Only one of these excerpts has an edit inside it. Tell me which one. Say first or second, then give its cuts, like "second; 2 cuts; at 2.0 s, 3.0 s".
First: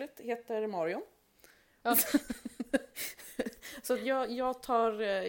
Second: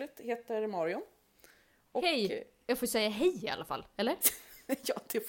first; 1 cut; at 1.8 s